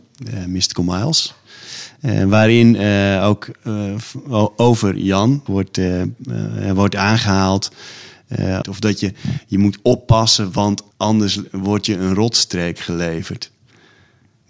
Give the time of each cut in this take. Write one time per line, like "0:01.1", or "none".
0:05.5
0:08.6
0:10.9